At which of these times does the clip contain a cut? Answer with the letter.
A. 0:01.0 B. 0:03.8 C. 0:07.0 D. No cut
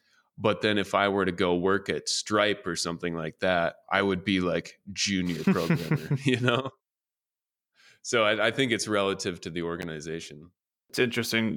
B